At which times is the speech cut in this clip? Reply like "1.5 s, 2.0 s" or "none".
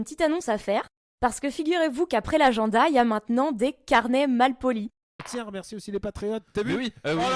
5.2 s